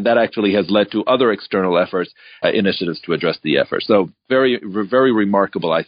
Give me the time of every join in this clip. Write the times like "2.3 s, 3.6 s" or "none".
2.4 s